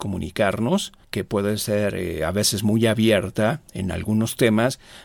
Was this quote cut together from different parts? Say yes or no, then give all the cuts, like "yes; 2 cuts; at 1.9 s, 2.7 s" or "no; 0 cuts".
yes; 1 cut; at 1.0 s